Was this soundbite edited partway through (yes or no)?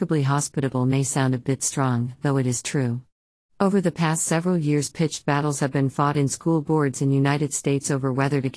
yes